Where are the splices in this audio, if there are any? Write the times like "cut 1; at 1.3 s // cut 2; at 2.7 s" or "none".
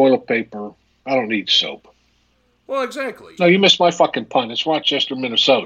cut 1; at 3.4 s